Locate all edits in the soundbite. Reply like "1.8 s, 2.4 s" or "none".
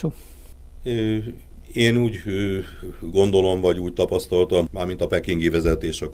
4.7 s